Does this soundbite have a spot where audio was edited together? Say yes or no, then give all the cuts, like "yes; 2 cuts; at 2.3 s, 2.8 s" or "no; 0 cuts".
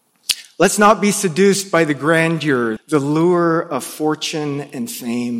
yes; 1 cut; at 2.8 s